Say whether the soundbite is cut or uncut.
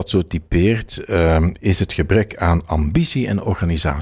uncut